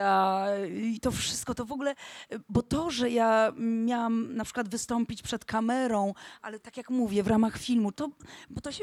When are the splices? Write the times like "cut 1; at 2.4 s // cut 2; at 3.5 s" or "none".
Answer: cut 1; at 7.9 s